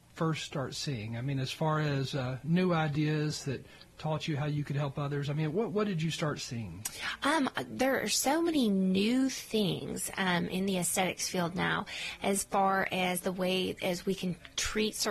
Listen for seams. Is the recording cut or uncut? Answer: uncut